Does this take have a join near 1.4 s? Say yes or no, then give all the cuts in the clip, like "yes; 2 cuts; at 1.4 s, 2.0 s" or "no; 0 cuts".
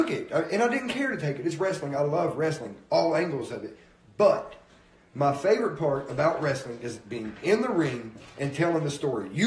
no; 0 cuts